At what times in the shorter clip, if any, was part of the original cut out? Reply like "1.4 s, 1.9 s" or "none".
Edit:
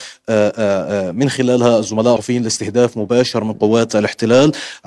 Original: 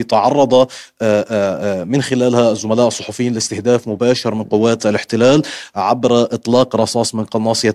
2.2 s

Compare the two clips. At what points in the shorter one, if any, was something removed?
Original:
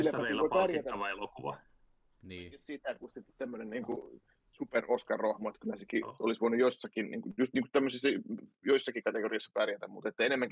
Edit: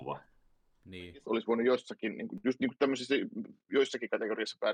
1.2 s

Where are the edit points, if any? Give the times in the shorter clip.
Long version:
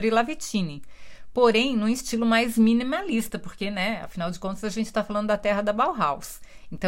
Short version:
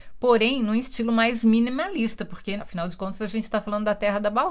2.6 s

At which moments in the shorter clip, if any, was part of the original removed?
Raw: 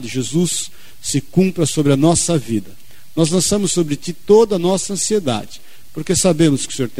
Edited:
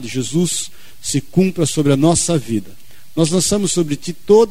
none

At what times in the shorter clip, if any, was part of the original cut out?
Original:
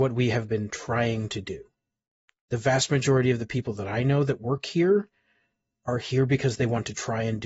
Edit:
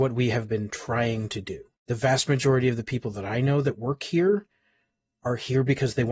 1.8 s

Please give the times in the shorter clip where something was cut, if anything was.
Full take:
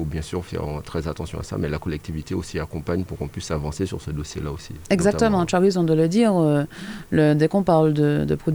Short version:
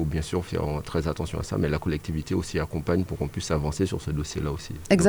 none

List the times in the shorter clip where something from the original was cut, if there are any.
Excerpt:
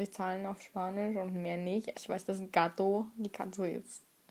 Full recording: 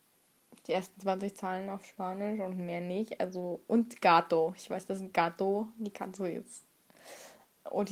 1.9 s

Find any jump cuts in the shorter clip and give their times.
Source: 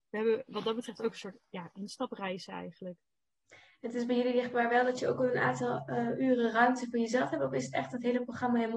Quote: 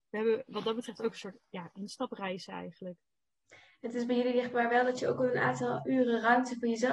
5.8 s

